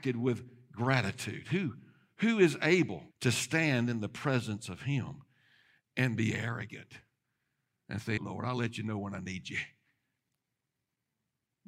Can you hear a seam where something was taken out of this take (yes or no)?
yes